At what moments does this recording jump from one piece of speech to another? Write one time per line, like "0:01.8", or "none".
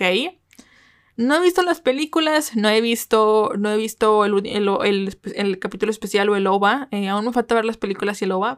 none